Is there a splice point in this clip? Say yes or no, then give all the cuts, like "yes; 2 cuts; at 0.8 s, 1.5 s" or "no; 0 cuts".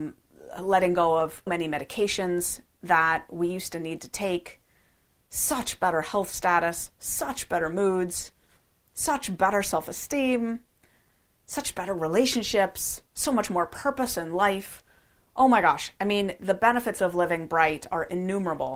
yes; 1 cut; at 1.5 s